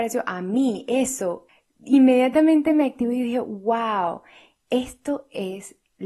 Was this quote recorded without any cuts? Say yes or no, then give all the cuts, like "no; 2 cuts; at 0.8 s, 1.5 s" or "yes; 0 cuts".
yes; 0 cuts